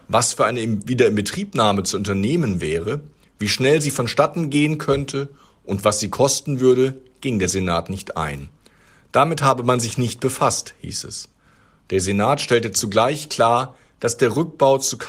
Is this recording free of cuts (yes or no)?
yes